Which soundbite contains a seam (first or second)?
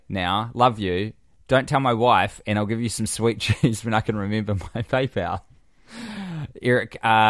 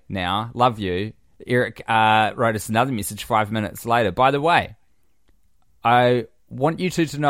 second